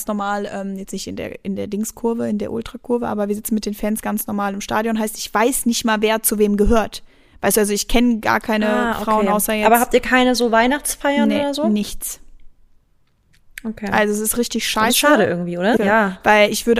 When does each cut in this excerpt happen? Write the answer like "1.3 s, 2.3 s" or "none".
15.8 s